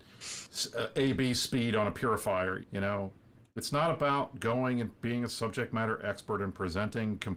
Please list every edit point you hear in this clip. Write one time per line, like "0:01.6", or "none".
0:02.6